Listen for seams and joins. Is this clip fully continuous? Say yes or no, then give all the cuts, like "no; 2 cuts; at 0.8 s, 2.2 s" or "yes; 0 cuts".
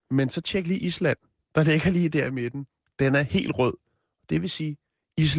yes; 0 cuts